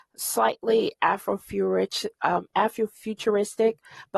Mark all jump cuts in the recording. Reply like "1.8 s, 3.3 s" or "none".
none